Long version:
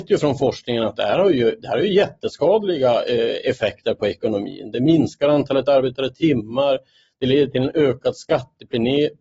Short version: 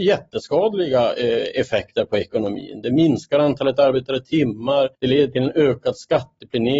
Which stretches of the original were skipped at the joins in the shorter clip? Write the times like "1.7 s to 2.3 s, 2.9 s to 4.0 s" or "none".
6.8 s to 7.1 s

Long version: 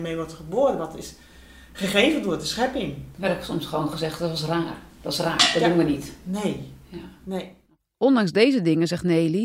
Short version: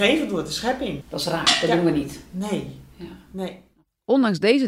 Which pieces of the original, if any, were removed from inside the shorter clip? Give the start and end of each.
3.0 s to 4.9 s

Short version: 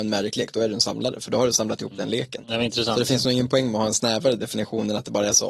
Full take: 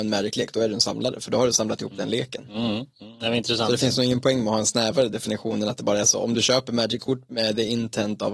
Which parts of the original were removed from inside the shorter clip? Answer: 2.4 s to 3.2 s

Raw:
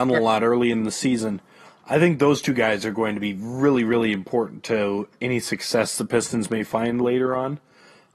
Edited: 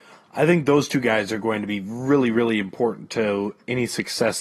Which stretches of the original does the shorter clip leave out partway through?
none

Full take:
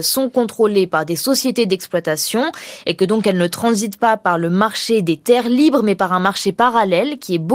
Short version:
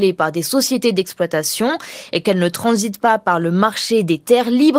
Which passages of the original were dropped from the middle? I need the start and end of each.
3.0 s to 3.2 s

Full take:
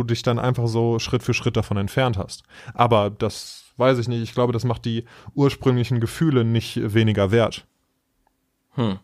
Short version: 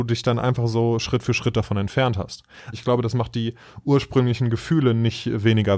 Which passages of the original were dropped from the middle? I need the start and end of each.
2.7 s to 4.2 s

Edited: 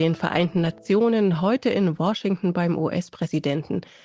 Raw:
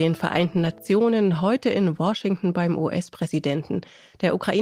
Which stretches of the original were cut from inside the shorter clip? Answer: none

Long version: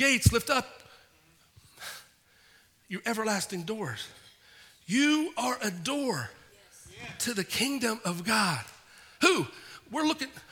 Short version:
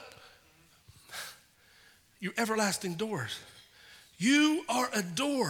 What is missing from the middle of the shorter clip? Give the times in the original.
none

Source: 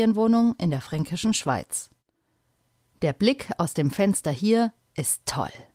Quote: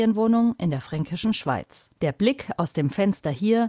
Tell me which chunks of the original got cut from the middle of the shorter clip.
2.0 s to 3.0 s

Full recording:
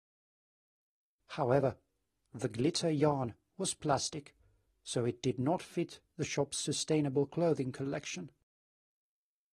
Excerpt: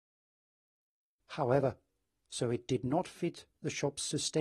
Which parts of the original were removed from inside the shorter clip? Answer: 2.3 s to 4.8 s

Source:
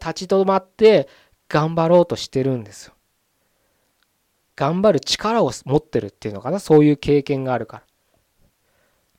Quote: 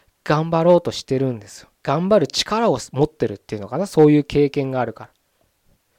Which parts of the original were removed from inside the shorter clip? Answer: 3.0 s to 4.5 s

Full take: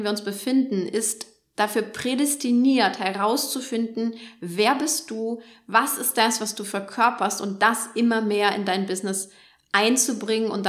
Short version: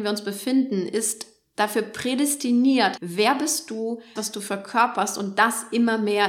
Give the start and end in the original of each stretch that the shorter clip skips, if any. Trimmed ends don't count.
3.0 s to 4.4 s, 5.6 s to 6.4 s

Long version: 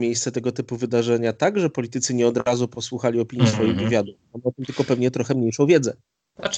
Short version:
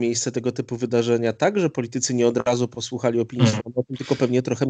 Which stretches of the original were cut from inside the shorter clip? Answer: 3.6 s to 4.3 s

